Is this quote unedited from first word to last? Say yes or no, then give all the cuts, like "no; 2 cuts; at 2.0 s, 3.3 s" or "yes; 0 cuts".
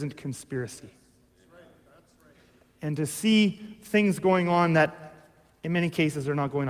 yes; 0 cuts